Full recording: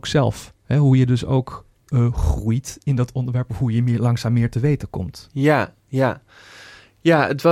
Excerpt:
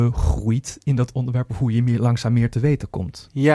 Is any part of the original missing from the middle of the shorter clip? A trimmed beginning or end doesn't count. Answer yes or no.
no